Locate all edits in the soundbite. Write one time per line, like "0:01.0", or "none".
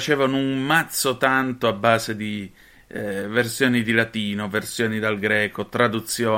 none